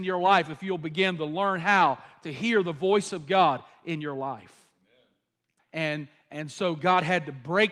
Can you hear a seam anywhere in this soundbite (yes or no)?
yes